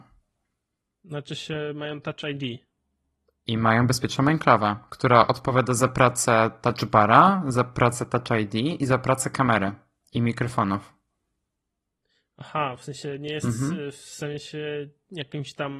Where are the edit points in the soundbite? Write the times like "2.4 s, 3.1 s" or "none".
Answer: none